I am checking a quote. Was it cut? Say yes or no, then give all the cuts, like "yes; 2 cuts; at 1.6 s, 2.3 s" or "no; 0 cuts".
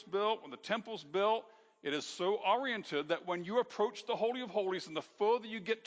no; 0 cuts